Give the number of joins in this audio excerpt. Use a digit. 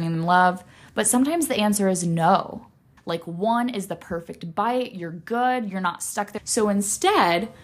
2